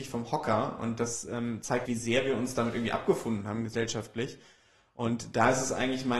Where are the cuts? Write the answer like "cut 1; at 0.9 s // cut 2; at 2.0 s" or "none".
cut 1; at 1.9 s